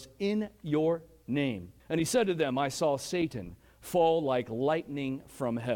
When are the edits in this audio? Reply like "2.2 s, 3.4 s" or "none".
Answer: 1.8 s